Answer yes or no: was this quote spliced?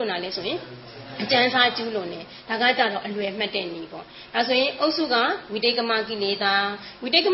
no